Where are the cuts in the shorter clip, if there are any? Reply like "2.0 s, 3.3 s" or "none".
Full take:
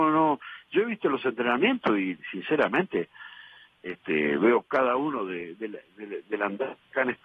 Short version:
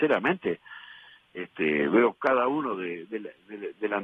none